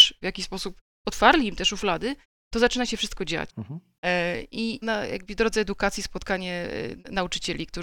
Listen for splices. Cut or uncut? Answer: cut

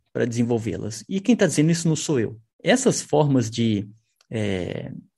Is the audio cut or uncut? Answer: cut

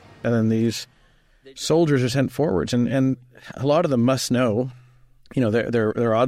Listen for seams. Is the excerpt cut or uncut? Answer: uncut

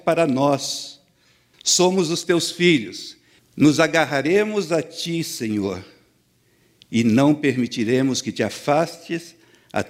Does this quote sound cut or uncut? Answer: cut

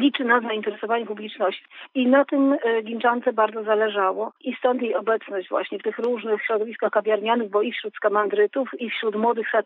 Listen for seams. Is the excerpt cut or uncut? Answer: uncut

